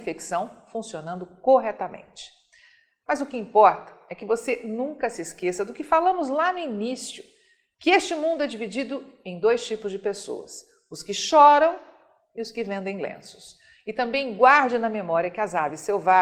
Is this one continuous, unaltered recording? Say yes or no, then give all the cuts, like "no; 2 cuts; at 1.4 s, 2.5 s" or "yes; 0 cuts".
yes; 0 cuts